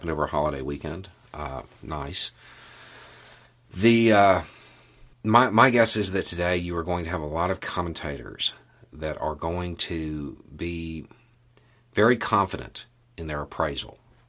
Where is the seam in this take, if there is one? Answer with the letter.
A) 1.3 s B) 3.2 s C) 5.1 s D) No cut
C